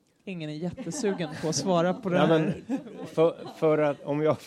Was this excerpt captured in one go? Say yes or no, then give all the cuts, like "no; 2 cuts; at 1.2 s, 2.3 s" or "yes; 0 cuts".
yes; 0 cuts